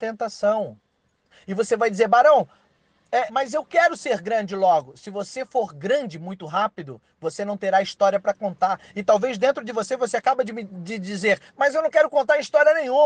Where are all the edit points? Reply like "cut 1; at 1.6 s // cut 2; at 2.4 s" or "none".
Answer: cut 1; at 3.3 s